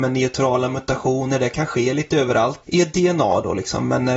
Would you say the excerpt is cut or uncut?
cut